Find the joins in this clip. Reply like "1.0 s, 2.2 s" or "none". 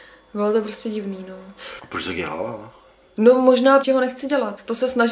1.8 s, 3.8 s